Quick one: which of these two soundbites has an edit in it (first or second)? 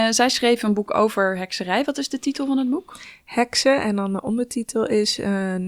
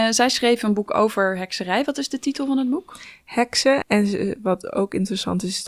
second